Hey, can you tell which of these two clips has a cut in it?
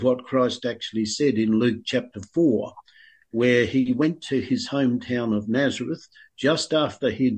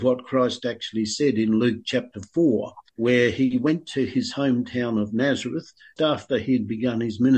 second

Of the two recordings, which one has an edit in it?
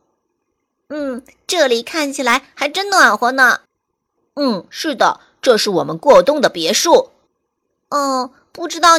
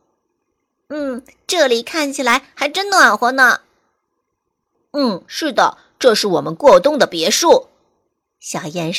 first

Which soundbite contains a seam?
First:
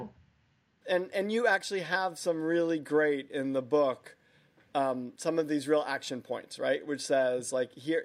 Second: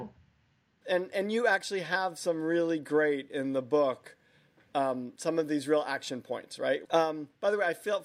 second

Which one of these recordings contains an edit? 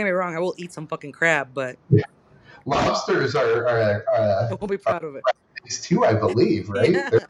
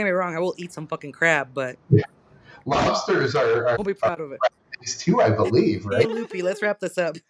second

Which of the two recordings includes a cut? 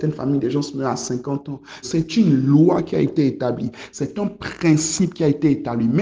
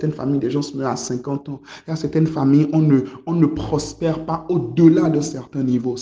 first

